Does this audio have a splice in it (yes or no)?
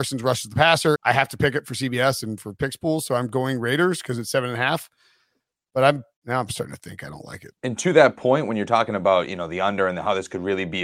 yes